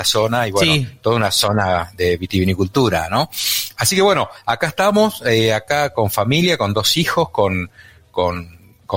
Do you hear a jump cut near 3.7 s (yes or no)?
no